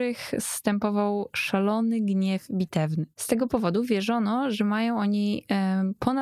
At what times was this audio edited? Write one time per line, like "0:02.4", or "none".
0:03.1